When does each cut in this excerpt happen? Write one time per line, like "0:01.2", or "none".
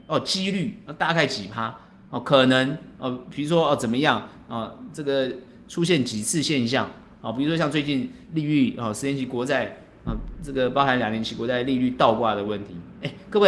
none